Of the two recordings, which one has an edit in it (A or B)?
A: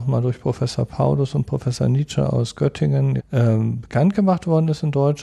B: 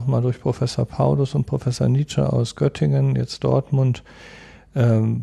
A